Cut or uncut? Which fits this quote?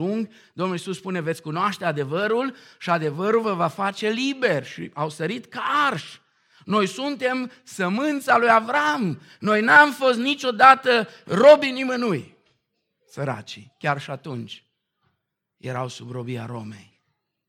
uncut